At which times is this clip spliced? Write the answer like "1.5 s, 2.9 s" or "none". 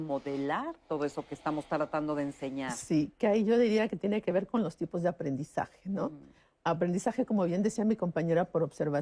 none